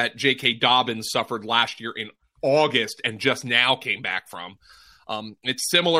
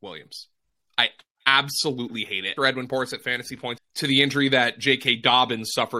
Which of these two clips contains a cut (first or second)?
second